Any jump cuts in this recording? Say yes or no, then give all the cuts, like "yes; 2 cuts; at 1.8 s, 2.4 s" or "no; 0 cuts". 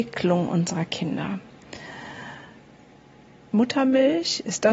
yes; 1 cut; at 3.5 s